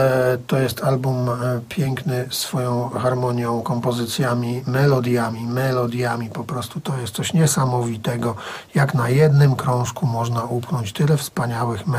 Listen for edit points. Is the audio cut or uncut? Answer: uncut